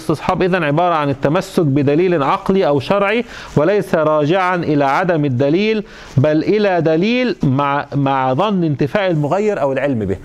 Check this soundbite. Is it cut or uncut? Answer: cut